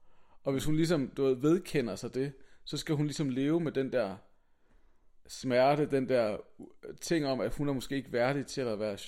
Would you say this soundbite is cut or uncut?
uncut